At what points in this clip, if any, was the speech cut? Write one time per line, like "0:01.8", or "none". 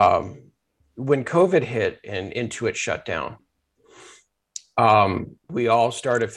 0:05.4